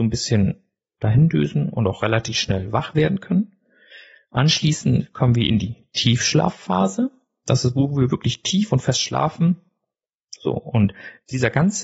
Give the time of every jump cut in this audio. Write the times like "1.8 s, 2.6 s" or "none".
10.4 s